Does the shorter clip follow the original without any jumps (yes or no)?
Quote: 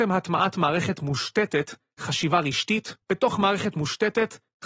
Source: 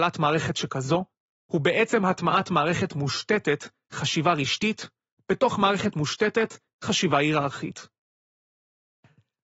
no